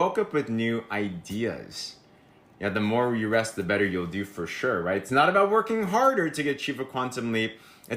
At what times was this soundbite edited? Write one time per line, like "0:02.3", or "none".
none